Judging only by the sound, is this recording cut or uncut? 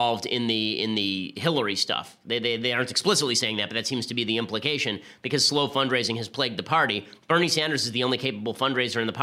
uncut